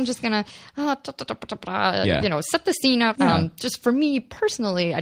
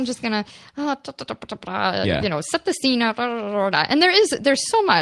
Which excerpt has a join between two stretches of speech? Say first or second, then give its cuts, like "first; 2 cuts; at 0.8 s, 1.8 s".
first; 1 cut; at 3.1 s